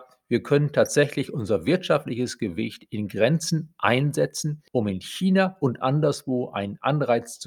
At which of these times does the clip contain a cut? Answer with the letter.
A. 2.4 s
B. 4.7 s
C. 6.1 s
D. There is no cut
D